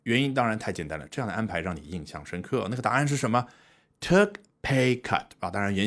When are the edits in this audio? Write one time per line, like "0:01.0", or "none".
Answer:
none